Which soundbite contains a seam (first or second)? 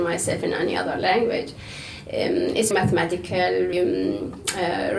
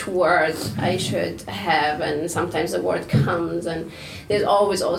first